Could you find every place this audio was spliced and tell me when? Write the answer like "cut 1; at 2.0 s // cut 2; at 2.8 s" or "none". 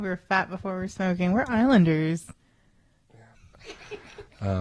cut 1; at 3.3 s